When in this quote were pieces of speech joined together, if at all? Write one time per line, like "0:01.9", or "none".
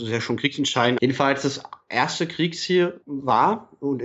0:01.0

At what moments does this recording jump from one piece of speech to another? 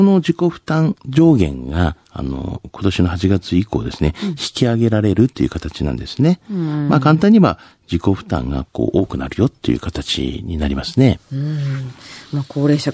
0:02.0

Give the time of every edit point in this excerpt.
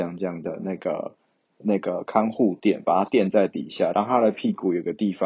none

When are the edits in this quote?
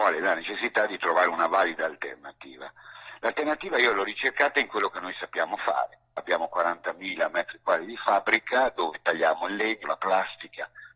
0:06.2
0:09.8

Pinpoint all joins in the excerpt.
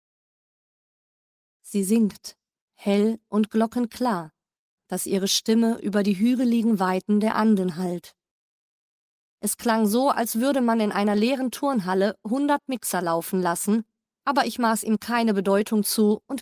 0:04.8
0:09.4

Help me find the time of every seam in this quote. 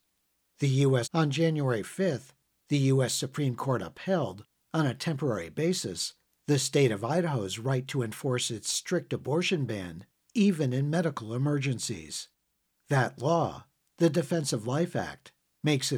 0:01.0

